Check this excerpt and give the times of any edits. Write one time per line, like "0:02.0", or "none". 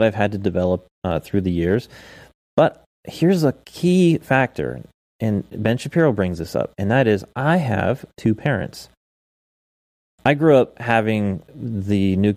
none